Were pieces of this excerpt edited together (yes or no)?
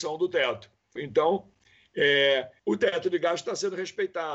yes